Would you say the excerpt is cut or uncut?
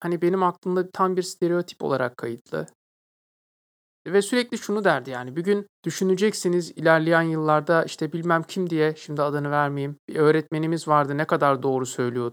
cut